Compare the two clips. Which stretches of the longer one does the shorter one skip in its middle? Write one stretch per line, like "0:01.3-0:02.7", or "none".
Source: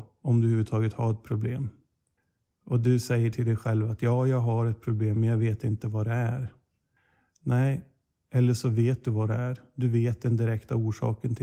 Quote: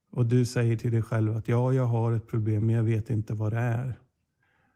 none